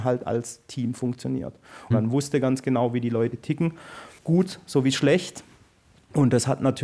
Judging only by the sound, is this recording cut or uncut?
cut